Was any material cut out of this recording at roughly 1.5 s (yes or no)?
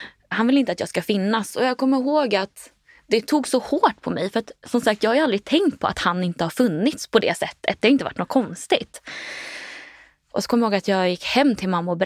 yes